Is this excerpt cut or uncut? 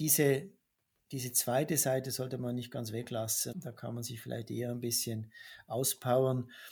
cut